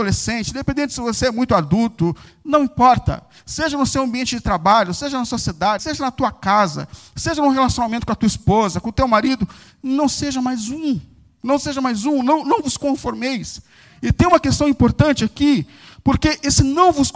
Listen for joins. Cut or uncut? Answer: cut